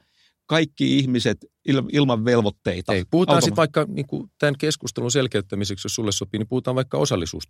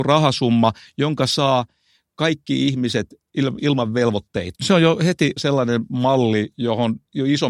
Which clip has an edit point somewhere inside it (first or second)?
second